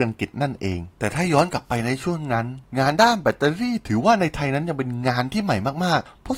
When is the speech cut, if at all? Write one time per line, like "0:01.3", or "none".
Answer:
0:00.9